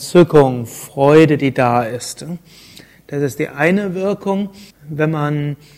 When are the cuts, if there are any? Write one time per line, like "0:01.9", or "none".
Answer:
0:04.7